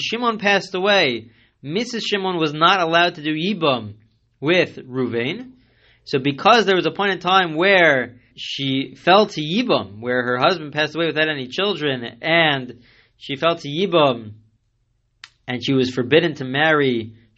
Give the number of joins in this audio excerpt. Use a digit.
1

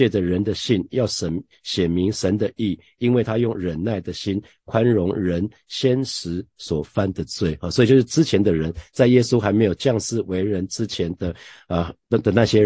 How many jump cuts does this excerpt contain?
0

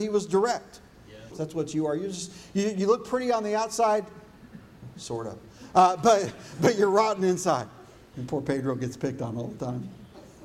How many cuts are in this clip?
1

